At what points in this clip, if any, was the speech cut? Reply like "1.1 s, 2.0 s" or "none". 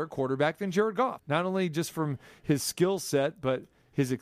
1.2 s

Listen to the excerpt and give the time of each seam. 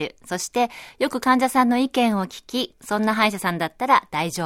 2.7 s

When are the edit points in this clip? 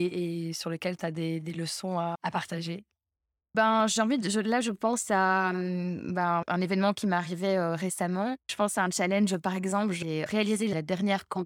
none

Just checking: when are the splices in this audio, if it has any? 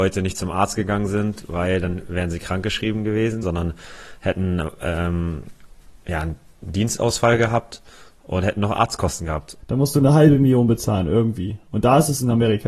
3.4 s, 9.6 s

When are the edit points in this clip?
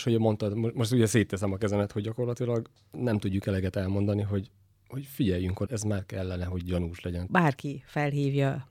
5.7 s, 7.3 s

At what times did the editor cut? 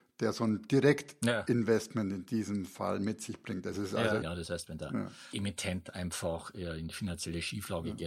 4.2 s

